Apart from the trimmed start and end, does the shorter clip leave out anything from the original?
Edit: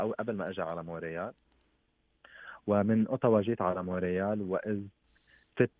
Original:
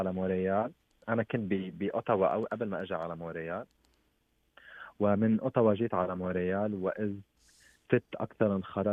no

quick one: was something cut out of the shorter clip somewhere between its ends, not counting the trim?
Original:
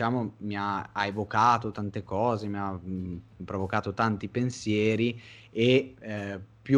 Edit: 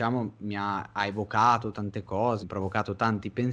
yes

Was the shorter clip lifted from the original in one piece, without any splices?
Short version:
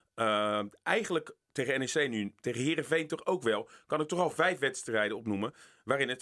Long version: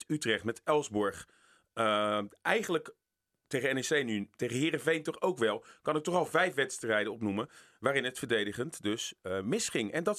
no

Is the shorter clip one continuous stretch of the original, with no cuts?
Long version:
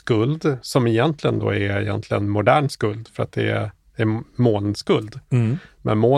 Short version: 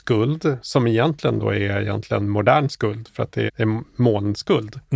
no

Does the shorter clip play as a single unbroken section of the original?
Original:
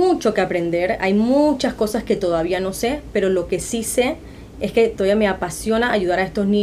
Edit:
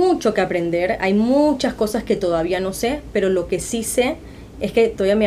yes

